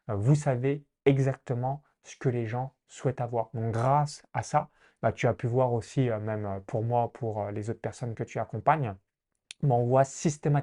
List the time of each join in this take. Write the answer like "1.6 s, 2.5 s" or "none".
none